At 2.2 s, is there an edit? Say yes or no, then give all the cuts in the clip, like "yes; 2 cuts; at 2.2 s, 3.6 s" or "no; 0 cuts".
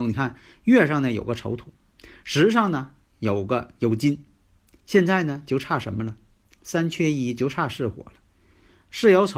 no; 0 cuts